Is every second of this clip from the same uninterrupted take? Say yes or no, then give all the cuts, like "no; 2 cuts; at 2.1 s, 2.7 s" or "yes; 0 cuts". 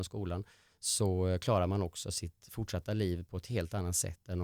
yes; 0 cuts